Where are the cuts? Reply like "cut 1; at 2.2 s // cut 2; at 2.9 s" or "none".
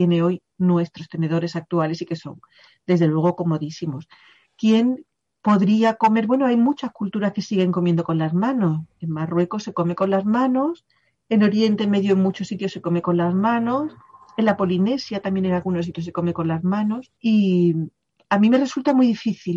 cut 1; at 17.2 s